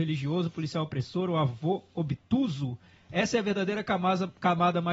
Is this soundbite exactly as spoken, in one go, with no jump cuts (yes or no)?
yes